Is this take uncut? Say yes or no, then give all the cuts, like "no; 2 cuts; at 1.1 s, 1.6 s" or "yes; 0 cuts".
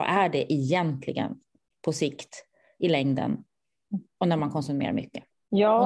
yes; 0 cuts